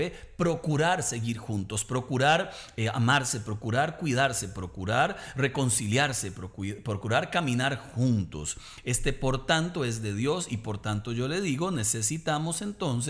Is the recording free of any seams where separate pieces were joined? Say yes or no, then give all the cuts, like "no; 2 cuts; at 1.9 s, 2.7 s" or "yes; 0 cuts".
yes; 0 cuts